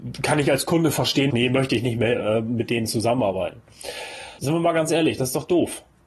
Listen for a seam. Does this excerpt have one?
yes; 2 cuts; at 1.3 s, 4.4 s

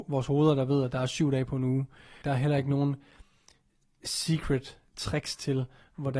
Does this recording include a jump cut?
yes; 2 cuts; at 2.2 s, 4.9 s

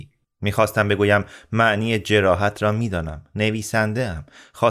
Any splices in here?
no; 0 cuts

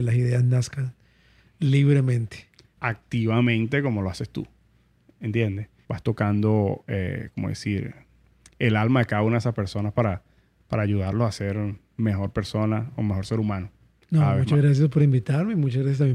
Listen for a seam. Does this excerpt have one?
yes; 2 cuts; at 2.8 s, 5.8 s

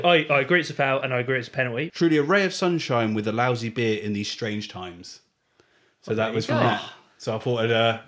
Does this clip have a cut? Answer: yes; 1 cut; at 1.9 s

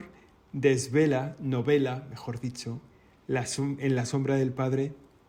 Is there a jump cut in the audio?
no; 0 cuts

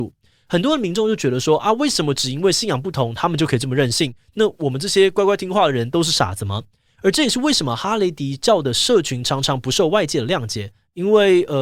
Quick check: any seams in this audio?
yes; 1 cut; at 6.9 s

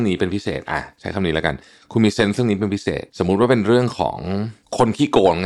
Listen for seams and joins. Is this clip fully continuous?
no; 1 cut; at 3.1 s

